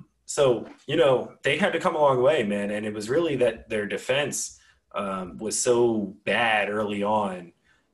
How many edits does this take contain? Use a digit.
1